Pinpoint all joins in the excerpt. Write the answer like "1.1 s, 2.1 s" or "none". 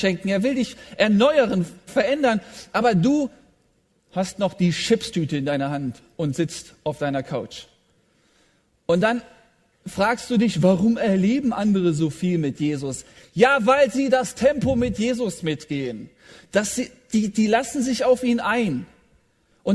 1.9 s